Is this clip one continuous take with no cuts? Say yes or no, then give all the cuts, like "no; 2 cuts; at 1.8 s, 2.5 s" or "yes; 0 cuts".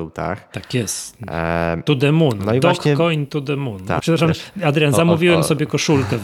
no; 1 cut; at 4.0 s